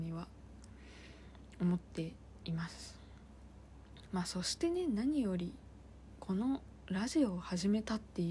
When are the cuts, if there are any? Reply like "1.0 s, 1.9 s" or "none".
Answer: 4.1 s